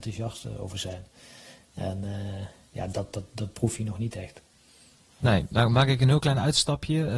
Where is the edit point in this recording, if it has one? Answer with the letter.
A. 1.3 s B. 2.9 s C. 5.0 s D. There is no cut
D